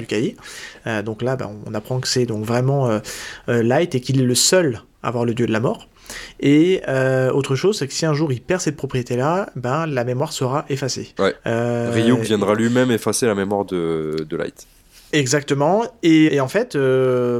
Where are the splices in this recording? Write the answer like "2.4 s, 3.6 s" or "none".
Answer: 11.2 s, 16.3 s